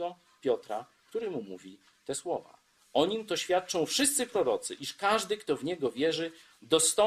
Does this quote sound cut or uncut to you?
uncut